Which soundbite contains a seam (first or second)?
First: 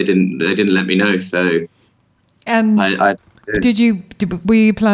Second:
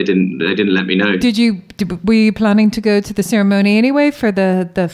second